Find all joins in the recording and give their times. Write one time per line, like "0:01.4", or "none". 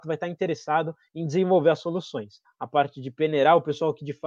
0:02.4

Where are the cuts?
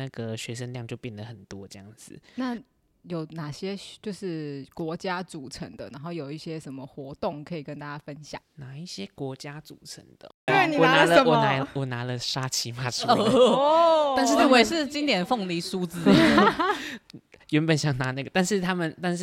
0:10.5

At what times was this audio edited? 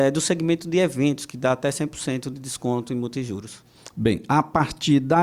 none

